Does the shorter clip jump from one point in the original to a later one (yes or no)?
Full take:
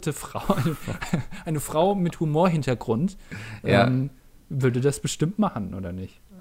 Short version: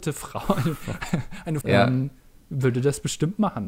yes